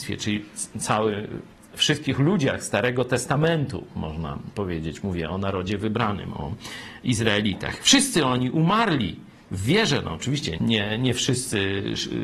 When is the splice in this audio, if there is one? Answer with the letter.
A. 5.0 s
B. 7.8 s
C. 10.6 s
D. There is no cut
C